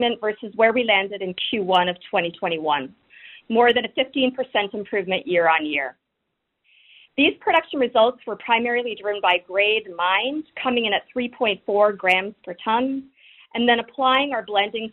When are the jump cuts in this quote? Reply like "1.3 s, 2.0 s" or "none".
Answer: none